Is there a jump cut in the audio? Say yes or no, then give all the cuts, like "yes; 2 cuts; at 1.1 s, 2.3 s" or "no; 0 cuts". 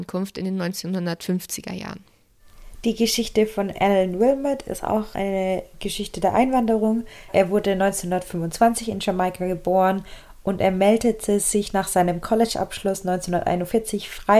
no; 0 cuts